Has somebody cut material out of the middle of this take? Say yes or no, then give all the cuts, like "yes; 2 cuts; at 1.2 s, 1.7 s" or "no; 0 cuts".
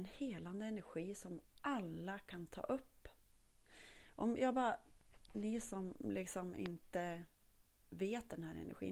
no; 0 cuts